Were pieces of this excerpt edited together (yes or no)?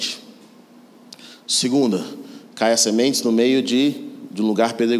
no